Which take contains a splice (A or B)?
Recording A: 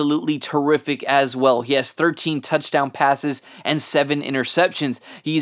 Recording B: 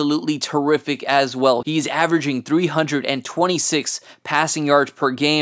B